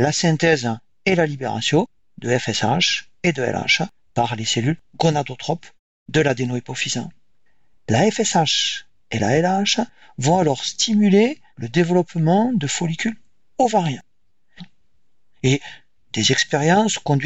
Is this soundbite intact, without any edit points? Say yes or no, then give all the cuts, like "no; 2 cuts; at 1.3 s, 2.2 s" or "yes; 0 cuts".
no; 2 cuts; at 11.5 s, 14.6 s